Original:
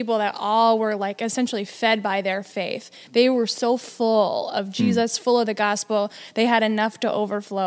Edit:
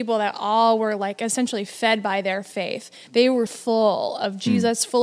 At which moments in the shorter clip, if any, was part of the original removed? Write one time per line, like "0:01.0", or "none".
0:03.5

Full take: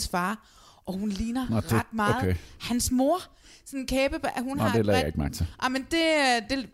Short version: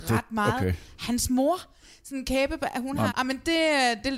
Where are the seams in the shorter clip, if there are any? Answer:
0:03.1

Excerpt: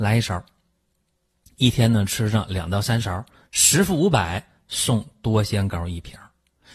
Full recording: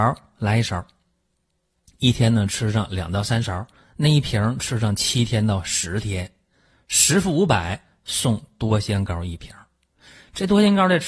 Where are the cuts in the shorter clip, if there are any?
0:03.4

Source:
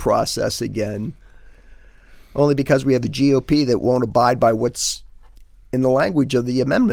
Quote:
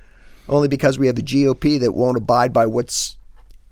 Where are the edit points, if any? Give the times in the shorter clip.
none

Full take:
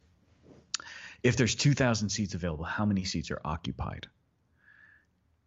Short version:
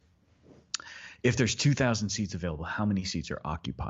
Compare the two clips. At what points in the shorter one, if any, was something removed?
none

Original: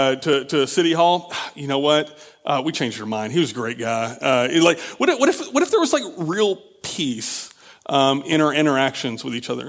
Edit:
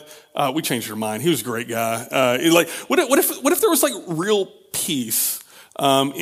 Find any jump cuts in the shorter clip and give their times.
none

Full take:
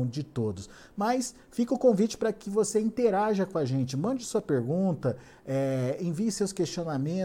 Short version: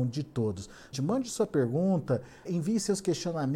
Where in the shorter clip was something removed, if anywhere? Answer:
0:00.9
0:02.5

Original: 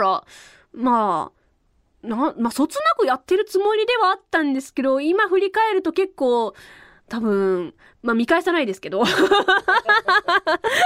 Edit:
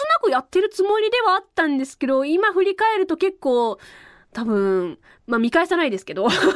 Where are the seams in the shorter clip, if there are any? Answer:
none

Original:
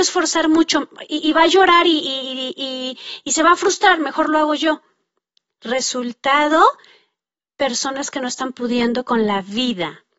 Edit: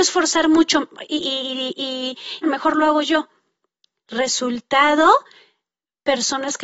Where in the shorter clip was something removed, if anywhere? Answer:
0:01.2
0:02.4

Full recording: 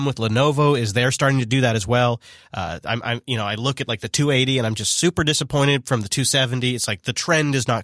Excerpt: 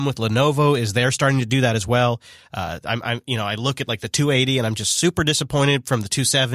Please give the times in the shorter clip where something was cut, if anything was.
none

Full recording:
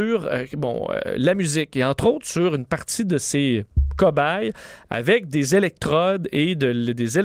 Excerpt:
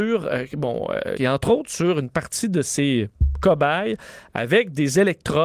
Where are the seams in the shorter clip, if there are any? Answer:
0:01.1

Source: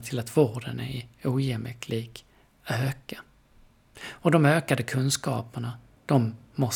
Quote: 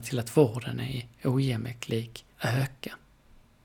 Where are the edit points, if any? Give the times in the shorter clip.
0:02.3

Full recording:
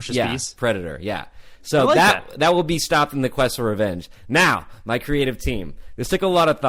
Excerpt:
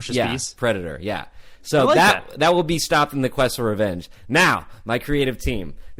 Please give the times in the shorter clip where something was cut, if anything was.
none

